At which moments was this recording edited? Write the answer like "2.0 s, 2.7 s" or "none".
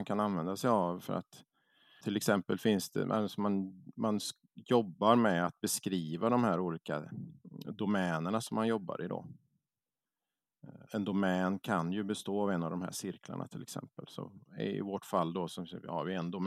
2.0 s, 10.9 s